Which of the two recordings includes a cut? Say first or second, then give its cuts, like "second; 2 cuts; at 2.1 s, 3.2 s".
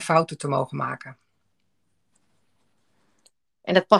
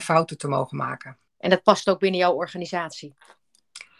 second; 1 cut; at 1.3 s